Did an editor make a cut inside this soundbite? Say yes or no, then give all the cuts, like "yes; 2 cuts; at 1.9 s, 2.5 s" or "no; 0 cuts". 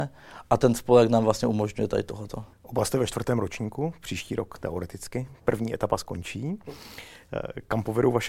yes; 1 cut; at 2.5 s